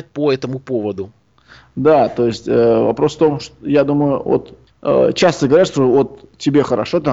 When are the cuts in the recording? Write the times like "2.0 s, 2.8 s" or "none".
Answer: none